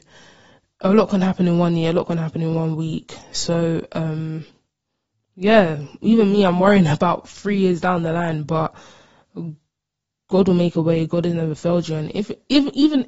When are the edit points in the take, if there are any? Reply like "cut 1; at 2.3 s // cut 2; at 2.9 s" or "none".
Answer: none